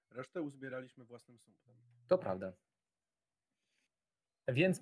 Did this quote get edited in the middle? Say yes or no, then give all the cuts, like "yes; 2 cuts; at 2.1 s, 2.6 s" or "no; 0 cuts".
no; 0 cuts